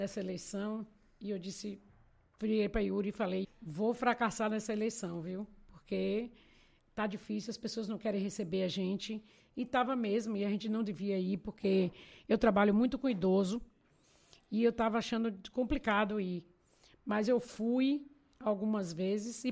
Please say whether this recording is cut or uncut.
cut